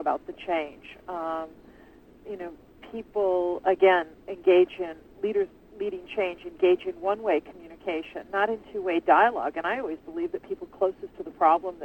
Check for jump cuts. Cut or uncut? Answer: uncut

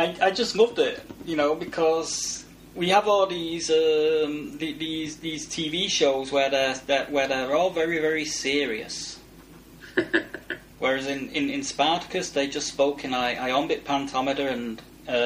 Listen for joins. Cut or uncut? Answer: uncut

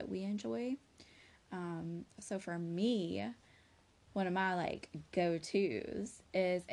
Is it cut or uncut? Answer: uncut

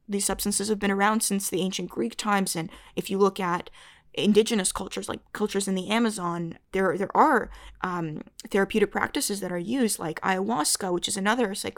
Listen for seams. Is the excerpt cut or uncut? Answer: uncut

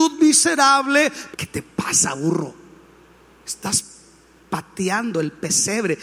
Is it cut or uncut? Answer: cut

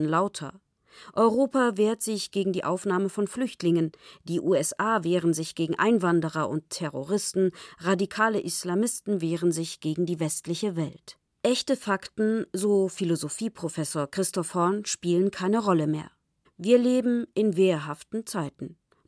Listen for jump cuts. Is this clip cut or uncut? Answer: cut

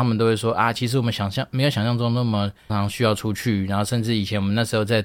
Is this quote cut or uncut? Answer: cut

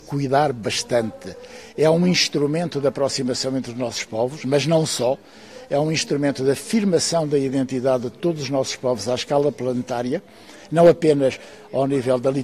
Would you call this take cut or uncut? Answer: uncut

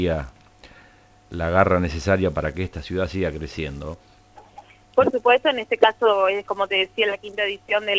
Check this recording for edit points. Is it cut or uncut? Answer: cut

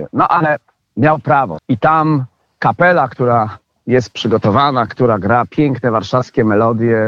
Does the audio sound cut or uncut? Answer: cut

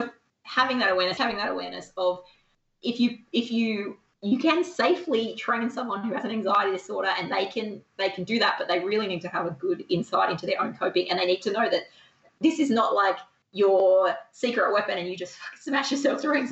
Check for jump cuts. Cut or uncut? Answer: cut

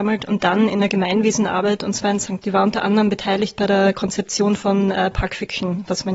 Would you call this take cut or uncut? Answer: cut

